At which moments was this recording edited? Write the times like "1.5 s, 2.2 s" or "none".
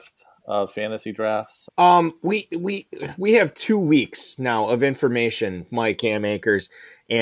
1.7 s, 6.0 s